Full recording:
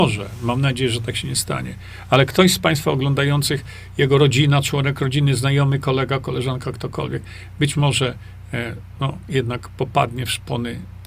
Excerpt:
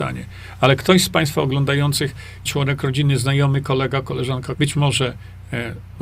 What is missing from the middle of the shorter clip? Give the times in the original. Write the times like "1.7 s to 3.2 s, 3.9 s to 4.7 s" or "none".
3.9 s to 4.6 s, 6.7 s to 7.5 s